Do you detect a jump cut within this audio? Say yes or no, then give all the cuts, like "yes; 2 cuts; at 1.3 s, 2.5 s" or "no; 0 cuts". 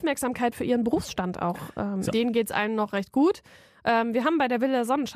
yes; 1 cut; at 2.1 s